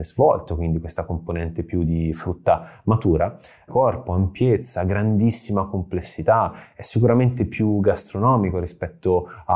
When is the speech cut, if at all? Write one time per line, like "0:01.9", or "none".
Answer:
0:03.7